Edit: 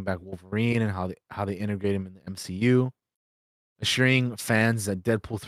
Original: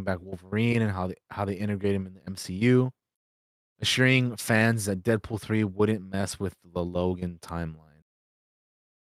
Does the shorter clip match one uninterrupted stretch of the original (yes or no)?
yes